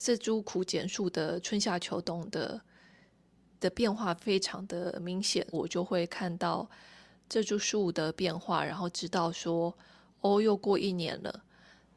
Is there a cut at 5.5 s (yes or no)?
yes